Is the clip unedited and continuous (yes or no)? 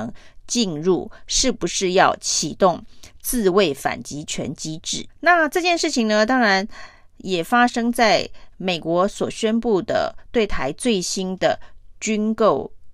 no